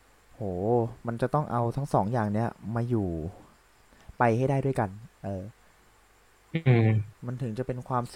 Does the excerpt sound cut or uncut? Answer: uncut